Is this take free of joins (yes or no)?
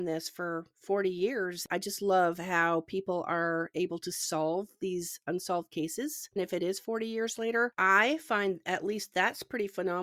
no